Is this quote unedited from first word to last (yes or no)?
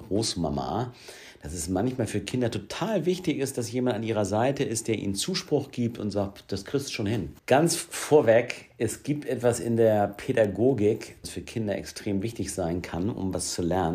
no